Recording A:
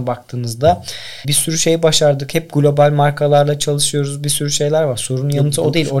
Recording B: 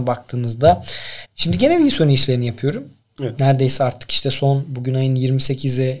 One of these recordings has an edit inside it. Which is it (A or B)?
B